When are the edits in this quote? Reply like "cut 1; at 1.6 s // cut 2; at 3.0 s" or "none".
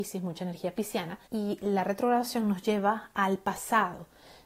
cut 1; at 1.3 s